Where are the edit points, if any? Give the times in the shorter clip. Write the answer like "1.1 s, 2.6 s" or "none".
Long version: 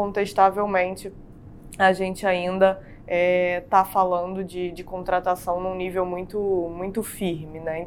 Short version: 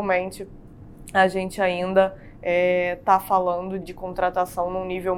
3.8 s